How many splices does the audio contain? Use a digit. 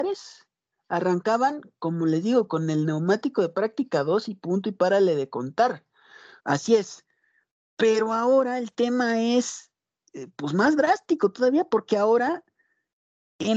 1